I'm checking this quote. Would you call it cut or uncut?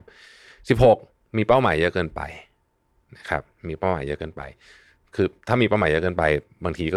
uncut